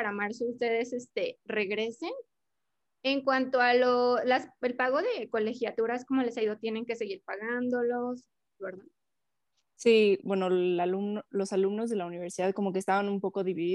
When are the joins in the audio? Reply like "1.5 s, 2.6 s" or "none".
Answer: 8.6 s, 10.2 s